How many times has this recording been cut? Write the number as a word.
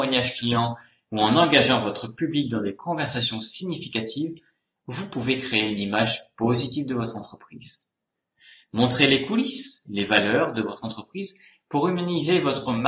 one